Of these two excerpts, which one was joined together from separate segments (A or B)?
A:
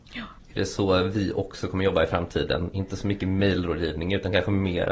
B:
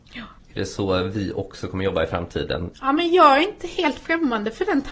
B